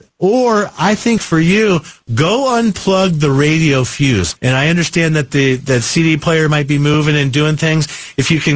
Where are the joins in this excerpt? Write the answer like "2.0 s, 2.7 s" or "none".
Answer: 4.4 s